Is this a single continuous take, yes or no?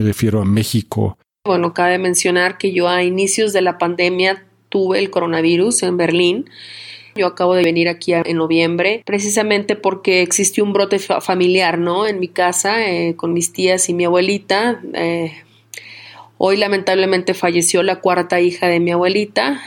yes